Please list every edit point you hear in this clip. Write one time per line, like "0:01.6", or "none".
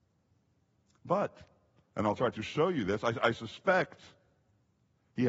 none